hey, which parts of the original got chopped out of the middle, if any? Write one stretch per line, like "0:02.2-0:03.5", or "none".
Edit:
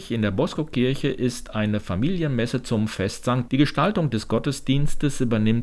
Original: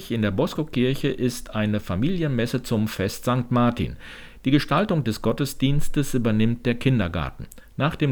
0:03.5-0:04.4